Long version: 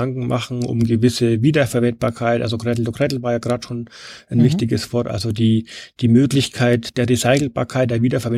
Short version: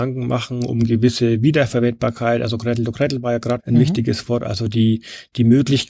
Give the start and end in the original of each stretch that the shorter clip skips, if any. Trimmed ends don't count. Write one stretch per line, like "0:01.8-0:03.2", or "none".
0:03.6-0:04.2